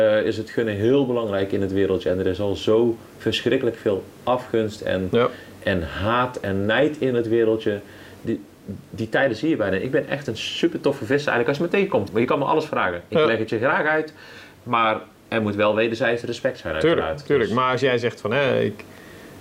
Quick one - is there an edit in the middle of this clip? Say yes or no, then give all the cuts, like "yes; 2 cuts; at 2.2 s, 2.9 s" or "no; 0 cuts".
yes; 1 cut; at 12.1 s